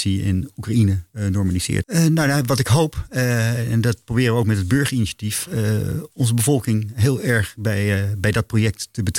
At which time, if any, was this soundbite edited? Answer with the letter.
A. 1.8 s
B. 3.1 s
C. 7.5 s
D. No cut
A